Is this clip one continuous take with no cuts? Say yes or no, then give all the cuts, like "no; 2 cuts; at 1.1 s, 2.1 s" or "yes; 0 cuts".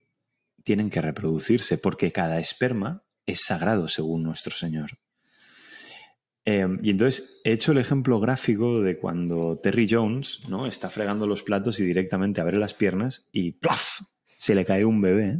yes; 0 cuts